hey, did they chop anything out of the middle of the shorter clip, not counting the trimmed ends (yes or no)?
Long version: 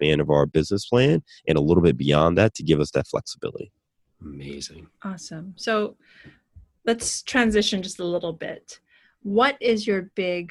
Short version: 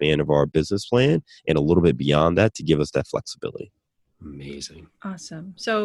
no